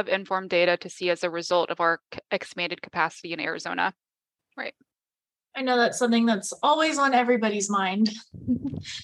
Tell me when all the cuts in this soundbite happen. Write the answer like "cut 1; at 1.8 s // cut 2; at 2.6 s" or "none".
cut 1; at 4.4 s